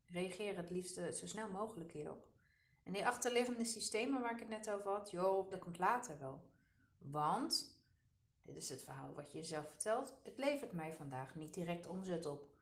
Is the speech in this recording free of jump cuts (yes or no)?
no